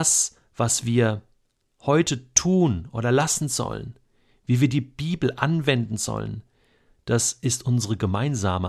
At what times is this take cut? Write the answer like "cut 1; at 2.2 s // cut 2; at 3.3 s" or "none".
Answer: none